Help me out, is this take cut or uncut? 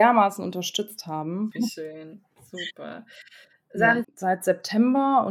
cut